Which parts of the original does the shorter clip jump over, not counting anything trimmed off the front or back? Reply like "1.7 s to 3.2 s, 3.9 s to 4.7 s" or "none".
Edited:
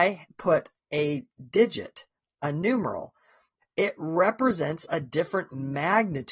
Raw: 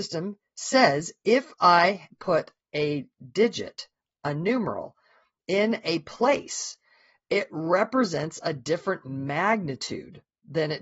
5.4 s to 7.1 s